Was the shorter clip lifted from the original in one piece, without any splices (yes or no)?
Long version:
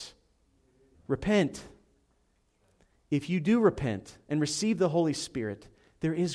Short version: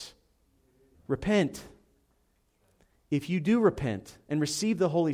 yes